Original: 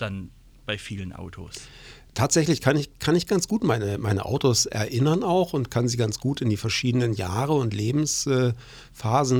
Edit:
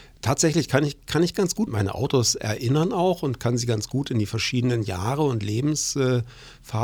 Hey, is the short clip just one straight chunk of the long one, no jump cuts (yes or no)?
no